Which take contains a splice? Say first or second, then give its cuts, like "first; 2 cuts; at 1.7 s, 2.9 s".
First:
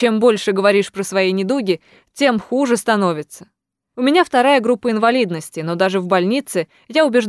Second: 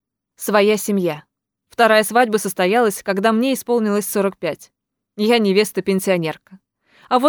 second; 1 cut; at 1.6 s